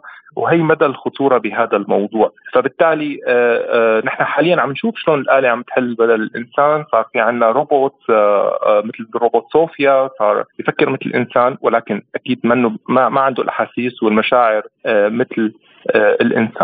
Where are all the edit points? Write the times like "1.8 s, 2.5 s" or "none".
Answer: none

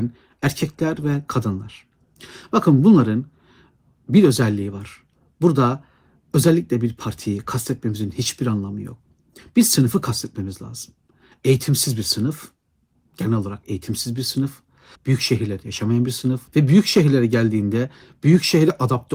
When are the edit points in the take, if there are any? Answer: 15.0 s, 16.5 s

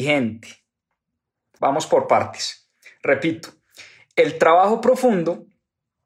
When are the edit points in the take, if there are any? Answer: 1.6 s

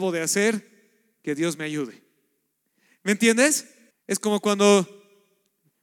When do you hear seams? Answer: 3.9 s

